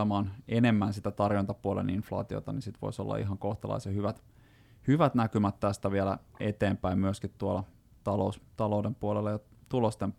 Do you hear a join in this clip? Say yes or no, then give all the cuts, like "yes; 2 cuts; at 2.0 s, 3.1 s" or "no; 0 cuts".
no; 0 cuts